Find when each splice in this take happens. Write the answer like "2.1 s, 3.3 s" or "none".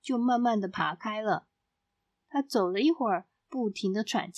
2.2 s, 3.4 s

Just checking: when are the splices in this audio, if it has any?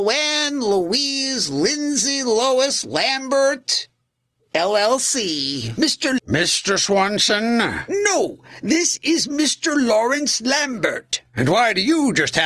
6.2 s

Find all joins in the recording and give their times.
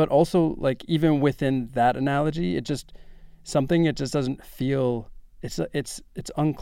none

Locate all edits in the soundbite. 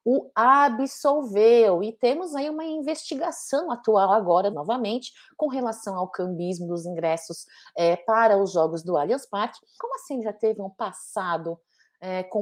4.5 s, 9.8 s

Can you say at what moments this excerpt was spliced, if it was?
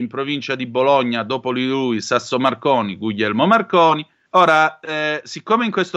4.3 s

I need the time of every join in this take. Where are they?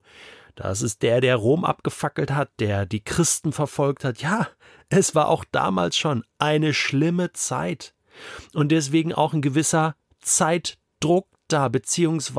none

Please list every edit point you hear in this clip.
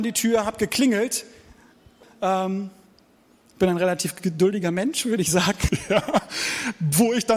2.0 s

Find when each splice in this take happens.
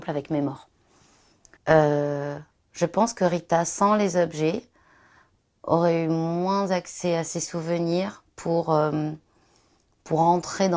1.6 s

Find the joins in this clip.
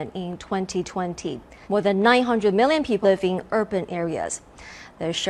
1.6 s, 3.0 s

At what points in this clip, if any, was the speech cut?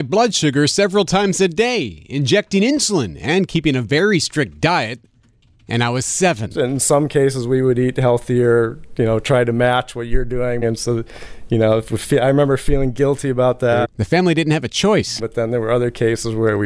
10.6 s, 13.8 s, 15.2 s

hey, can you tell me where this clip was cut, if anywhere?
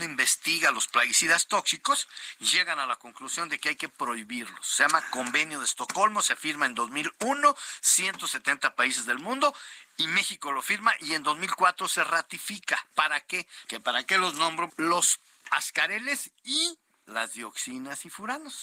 13.7 s, 14.7 s

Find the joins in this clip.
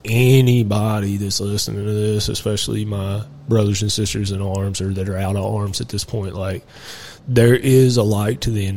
7.2 s

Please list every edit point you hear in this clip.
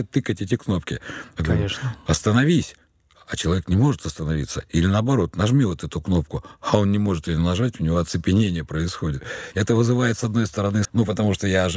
9.5 s, 10.8 s

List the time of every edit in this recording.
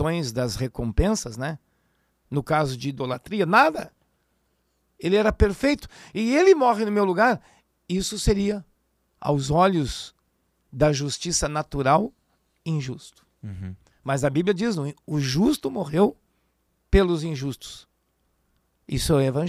2.1 s

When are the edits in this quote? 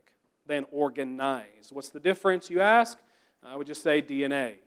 none

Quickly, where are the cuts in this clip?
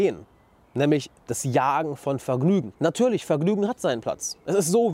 none

